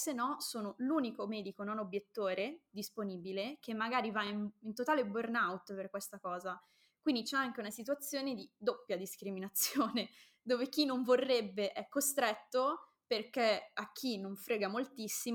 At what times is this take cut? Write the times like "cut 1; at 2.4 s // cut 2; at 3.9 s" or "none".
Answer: none